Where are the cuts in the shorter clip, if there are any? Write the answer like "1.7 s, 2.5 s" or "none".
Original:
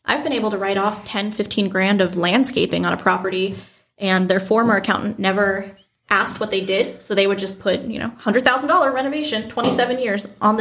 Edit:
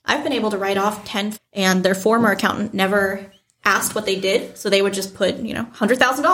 1.3 s